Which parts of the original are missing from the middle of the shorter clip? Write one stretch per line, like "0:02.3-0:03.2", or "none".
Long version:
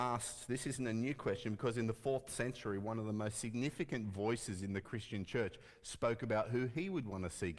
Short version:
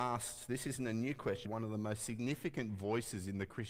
0:01.4-0:02.8